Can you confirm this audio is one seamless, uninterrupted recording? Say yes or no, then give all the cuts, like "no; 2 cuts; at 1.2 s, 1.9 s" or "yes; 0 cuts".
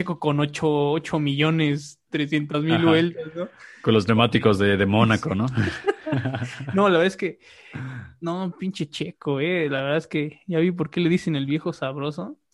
yes; 0 cuts